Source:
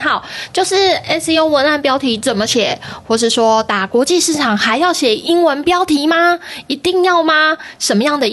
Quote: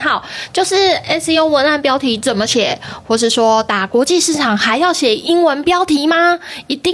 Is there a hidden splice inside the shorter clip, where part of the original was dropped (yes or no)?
no